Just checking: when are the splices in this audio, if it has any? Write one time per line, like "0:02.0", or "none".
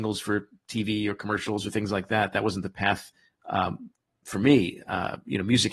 none